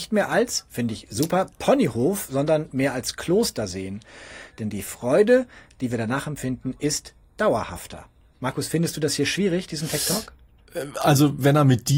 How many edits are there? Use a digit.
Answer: 1